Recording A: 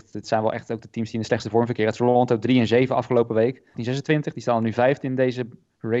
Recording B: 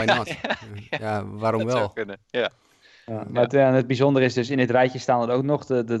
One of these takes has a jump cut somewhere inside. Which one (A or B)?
A